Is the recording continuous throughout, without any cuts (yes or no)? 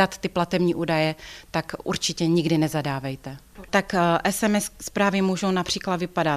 no